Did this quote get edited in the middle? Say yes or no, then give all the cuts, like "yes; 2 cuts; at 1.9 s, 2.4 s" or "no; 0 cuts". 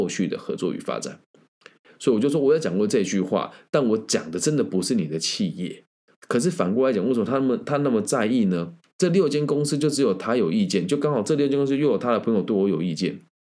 no; 0 cuts